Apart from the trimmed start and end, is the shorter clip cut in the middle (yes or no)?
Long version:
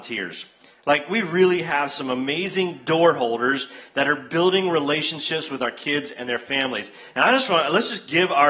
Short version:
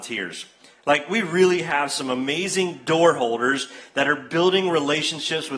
no